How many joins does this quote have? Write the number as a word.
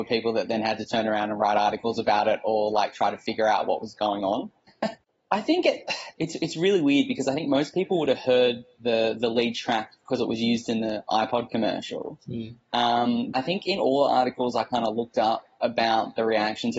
two